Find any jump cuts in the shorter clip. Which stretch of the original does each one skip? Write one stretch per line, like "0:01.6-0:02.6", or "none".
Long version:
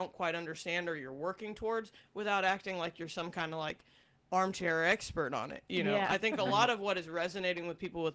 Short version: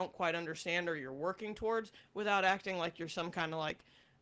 none